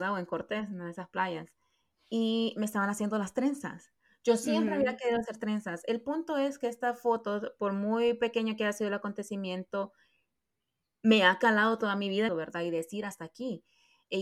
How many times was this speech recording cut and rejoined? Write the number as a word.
one